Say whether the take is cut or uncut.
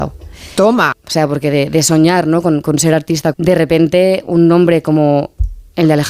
cut